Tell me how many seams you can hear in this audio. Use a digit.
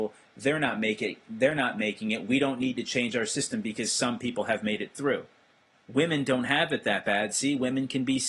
1